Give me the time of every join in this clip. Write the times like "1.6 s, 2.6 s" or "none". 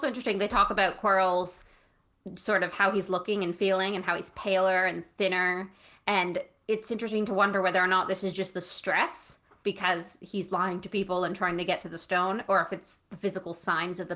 none

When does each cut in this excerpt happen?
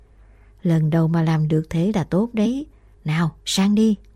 2.9 s

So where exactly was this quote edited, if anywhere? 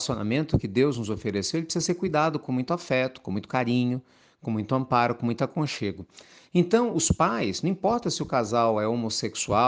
none

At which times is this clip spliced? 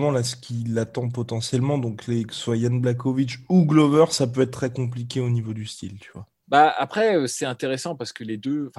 6.4 s

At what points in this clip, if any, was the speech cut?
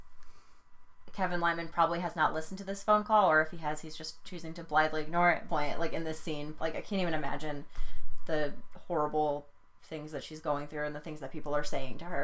5.5 s, 6.6 s

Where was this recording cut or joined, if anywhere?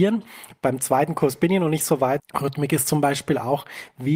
2.2 s

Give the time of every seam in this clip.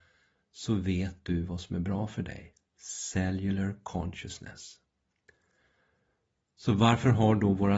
none

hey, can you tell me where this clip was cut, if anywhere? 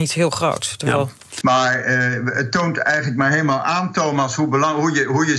1.4 s

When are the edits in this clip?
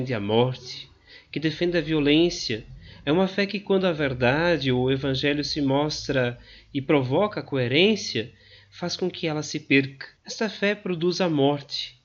3.0 s, 10.2 s

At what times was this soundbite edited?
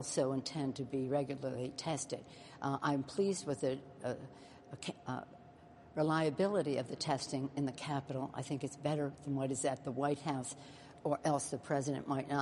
none

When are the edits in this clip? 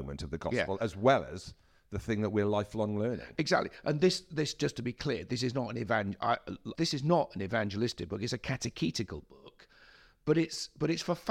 6.7 s

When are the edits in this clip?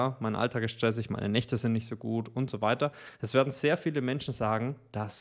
none

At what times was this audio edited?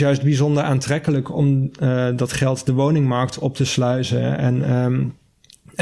none

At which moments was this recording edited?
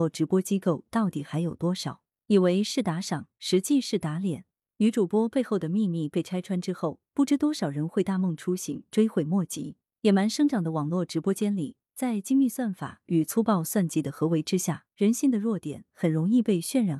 9.9 s, 14.9 s

